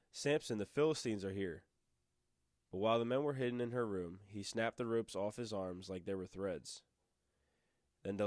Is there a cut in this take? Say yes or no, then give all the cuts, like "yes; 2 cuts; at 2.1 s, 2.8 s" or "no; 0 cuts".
no; 0 cuts